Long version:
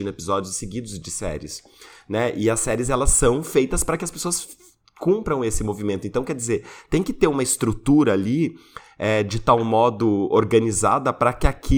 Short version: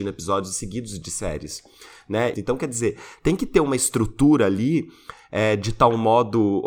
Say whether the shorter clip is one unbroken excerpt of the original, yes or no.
no